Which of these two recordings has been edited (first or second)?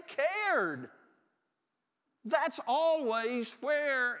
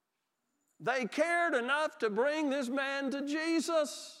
first